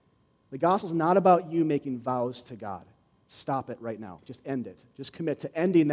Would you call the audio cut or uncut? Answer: uncut